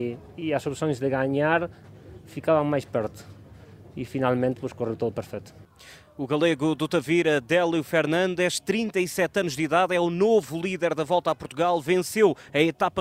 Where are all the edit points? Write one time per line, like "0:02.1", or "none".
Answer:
none